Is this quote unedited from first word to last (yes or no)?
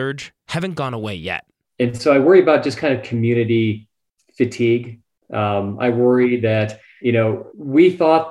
yes